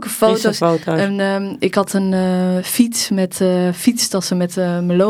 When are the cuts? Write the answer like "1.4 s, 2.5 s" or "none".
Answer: none